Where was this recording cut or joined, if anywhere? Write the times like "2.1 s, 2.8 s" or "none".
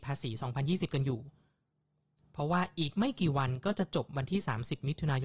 none